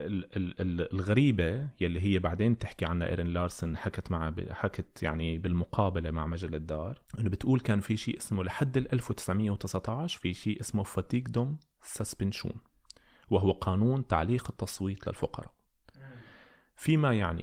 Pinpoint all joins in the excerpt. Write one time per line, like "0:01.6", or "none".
0:07.1

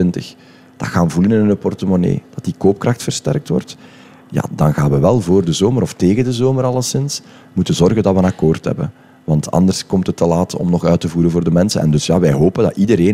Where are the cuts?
0:04.5

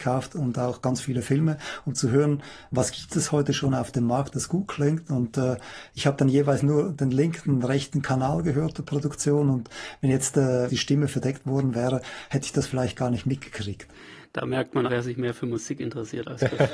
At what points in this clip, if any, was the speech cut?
0:10.7
0:14.9

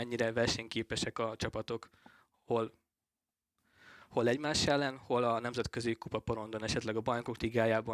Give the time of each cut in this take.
none

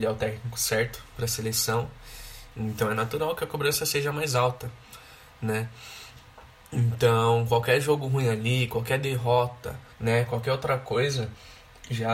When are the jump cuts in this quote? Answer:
0:02.5
0:09.9

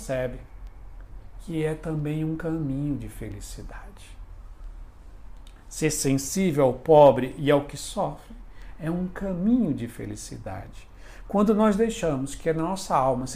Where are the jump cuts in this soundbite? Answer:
none

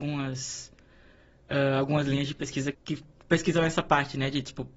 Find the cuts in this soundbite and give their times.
0:02.7

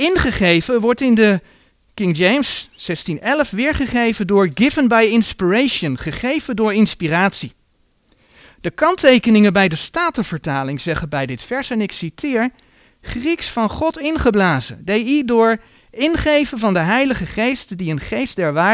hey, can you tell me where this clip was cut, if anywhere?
none

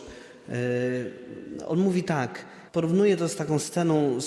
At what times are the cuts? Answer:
0:02.7

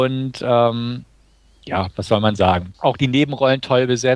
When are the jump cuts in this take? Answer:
0:02.7

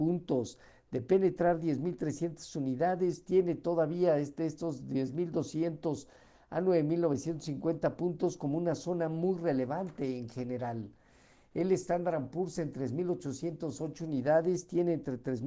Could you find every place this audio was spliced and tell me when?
none

